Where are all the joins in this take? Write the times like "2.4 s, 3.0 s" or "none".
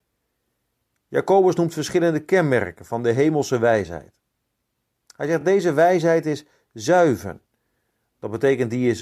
none